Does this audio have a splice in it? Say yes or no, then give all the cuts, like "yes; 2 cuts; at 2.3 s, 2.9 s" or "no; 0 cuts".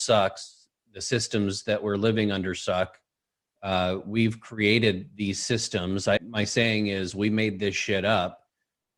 yes; 1 cut; at 6.2 s